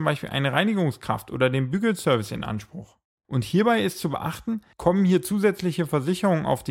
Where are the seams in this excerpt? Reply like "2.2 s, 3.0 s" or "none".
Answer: 3.2 s, 4.7 s

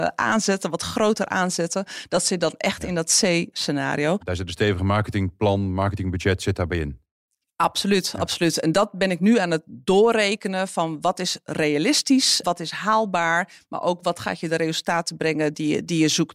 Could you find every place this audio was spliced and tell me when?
12.4 s

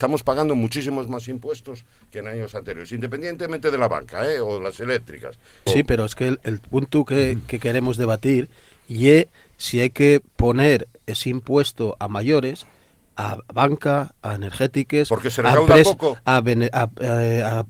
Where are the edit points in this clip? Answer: 5.7 s

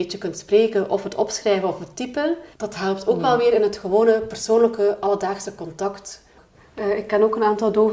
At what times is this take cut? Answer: 2.5 s, 6.4 s

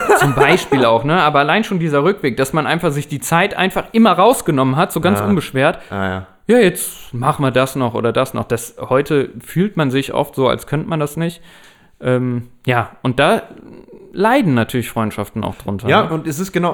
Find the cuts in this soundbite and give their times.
none

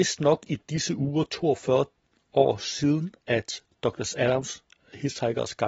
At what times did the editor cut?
none

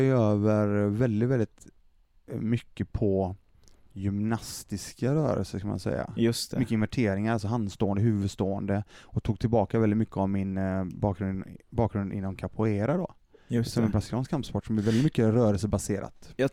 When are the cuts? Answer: none

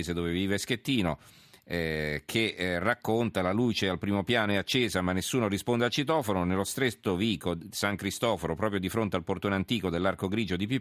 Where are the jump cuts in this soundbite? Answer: none

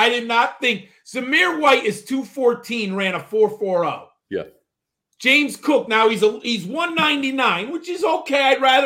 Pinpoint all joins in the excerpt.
none

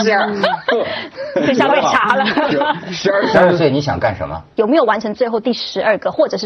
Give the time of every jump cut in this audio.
3.3 s, 4.6 s

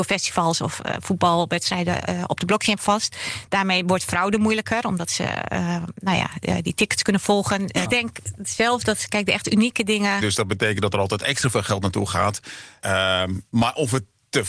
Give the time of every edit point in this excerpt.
7.8 s, 10.2 s, 12.8 s

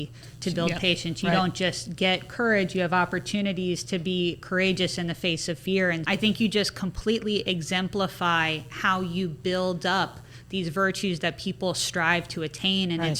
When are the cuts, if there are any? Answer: 6.0 s

